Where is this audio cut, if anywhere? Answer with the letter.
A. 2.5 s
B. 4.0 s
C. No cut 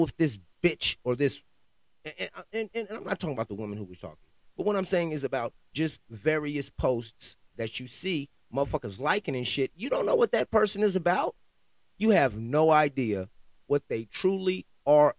B